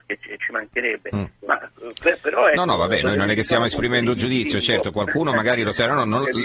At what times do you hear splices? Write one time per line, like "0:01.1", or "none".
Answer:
none